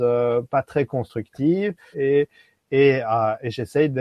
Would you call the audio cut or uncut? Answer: cut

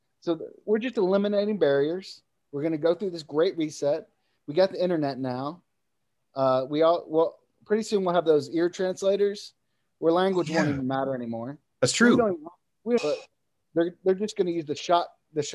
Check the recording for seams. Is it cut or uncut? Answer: cut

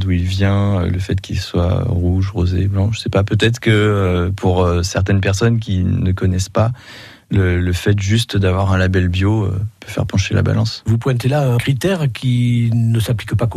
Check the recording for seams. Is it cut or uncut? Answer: uncut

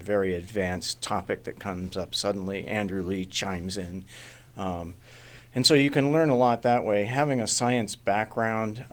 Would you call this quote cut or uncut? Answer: uncut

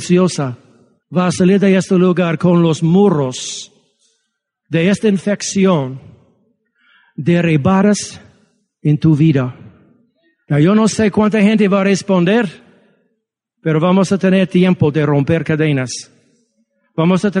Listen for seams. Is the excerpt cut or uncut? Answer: uncut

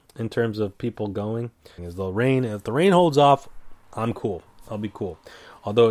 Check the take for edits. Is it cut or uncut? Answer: cut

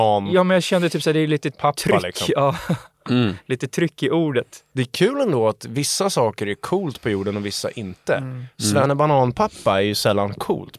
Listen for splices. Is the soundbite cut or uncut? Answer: uncut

